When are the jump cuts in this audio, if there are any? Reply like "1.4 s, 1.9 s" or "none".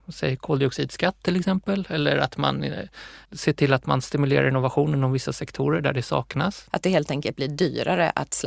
3.2 s, 6.7 s